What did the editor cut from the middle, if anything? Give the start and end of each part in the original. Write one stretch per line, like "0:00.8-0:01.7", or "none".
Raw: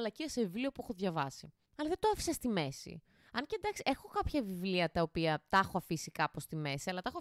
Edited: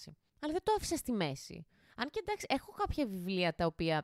none